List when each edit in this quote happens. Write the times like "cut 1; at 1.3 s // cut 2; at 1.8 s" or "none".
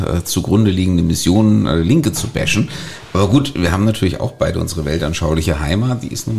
none

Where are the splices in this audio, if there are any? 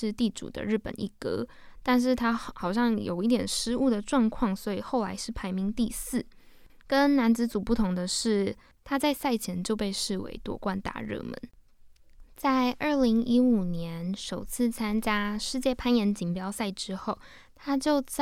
cut 1; at 6.7 s

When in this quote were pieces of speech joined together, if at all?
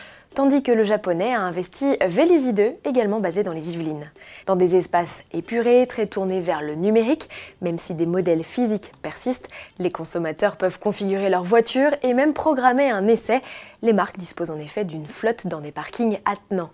cut 1; at 4.4 s

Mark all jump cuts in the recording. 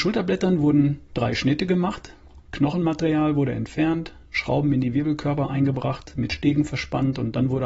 none

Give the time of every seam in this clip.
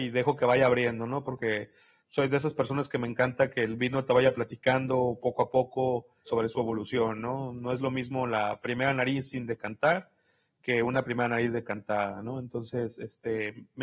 cut 1; at 6.3 s

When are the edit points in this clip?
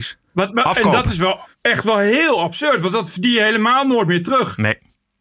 cut 1; at 1.5 s

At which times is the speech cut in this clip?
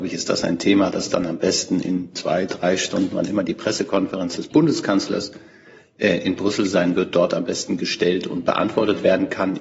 none

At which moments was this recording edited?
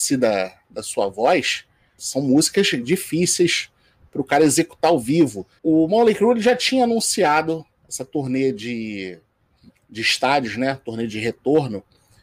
cut 1; at 2.0 s // cut 2; at 5.6 s

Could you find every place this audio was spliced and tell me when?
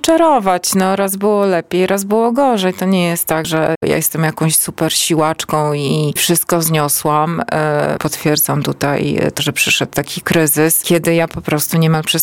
cut 1; at 3.4 s // cut 2; at 8.0 s // cut 3; at 9.4 s

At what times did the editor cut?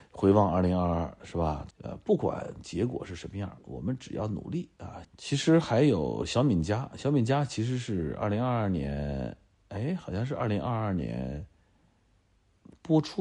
cut 1; at 1.7 s // cut 2; at 5.0 s

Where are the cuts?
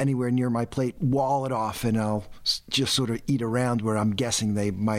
cut 1; at 1.0 s

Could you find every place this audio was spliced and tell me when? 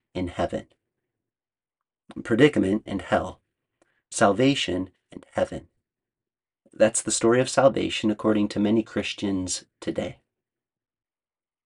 cut 1; at 2.9 s // cut 2; at 4.9 s

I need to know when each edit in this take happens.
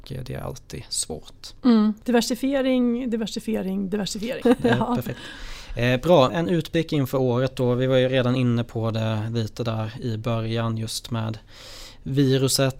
cut 1; at 4.4 s // cut 2; at 6.3 s

